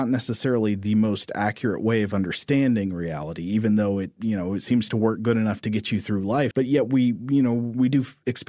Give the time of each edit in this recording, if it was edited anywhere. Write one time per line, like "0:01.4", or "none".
0:06.5